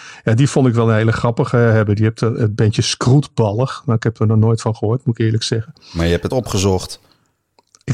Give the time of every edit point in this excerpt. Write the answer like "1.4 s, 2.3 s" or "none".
6.3 s

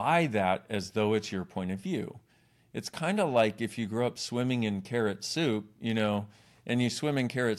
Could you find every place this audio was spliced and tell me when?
none

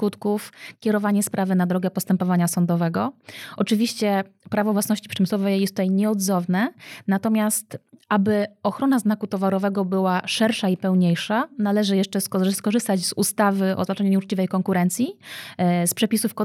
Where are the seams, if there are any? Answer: none

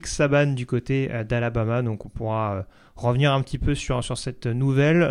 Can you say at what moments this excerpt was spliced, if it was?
none

